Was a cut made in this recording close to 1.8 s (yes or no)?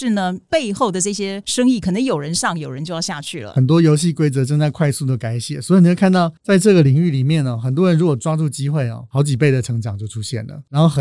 no